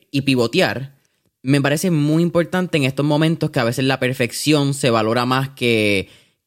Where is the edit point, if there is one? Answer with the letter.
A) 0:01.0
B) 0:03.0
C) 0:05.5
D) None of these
D